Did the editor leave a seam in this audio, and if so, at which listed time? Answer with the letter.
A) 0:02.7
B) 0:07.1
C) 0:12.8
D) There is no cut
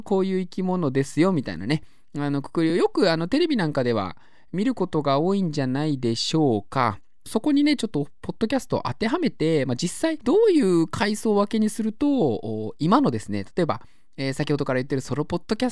D